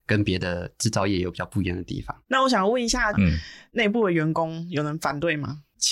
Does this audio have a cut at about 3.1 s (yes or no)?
yes